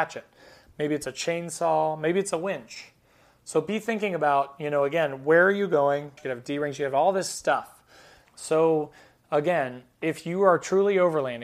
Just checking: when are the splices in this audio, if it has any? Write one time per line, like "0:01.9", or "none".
0:06.2
0:08.2